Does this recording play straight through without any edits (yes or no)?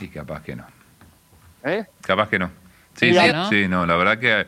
no